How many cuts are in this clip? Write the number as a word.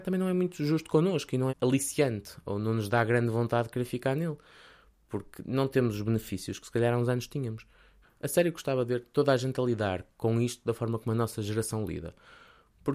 two